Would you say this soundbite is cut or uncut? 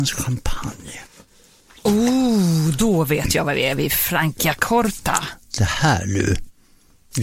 uncut